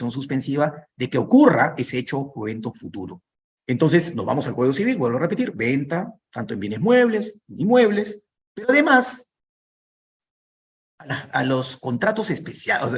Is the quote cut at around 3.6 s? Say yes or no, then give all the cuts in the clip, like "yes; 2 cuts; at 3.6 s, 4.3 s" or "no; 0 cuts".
yes; 1 cut; at 3.6 s